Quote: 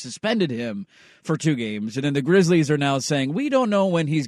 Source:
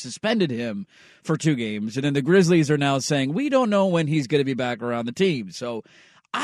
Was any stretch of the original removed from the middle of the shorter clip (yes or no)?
no